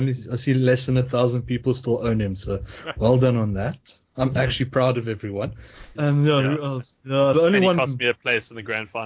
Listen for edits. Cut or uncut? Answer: cut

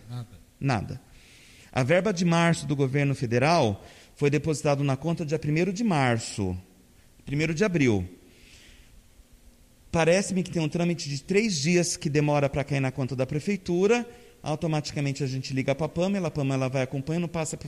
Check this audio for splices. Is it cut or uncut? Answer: uncut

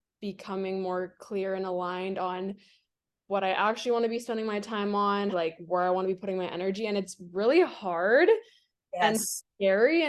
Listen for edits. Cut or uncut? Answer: cut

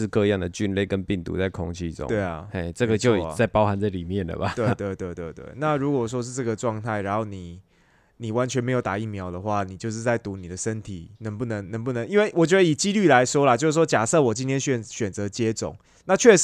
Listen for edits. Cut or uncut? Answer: cut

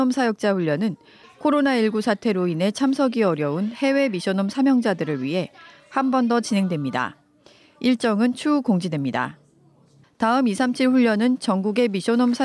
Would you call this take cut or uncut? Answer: cut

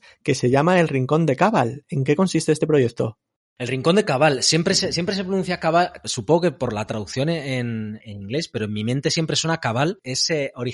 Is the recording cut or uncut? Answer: cut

